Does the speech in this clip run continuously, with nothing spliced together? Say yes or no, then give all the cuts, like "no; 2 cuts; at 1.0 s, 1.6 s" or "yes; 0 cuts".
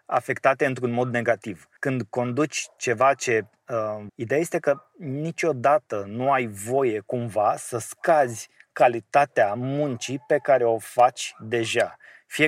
no; 2 cuts; at 1.8 s, 4.1 s